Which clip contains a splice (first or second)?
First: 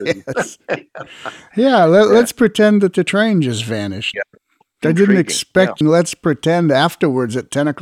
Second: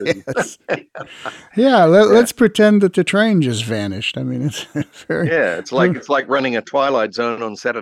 first